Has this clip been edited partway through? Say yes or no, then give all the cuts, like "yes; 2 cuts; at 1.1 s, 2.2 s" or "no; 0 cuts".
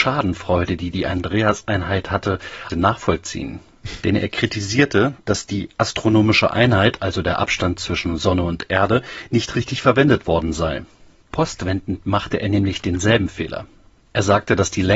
yes; 1 cut; at 2.7 s